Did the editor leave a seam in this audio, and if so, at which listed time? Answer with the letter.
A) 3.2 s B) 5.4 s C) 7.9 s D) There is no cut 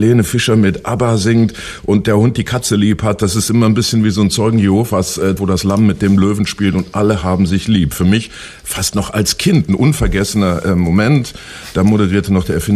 B